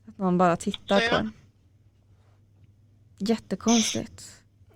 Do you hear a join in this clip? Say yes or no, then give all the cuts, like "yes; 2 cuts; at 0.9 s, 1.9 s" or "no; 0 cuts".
no; 0 cuts